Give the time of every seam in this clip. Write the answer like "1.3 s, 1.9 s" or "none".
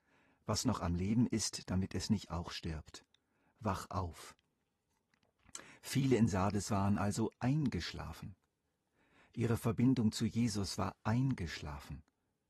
none